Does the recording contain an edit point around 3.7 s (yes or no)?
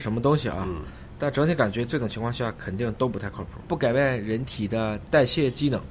yes